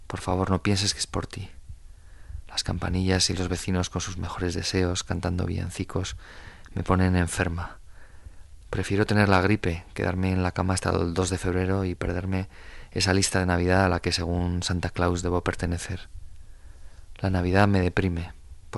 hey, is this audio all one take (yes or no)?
yes